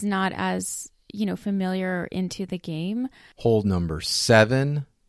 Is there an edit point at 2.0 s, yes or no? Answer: no